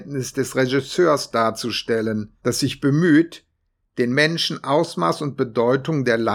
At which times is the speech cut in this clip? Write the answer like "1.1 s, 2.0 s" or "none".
2.4 s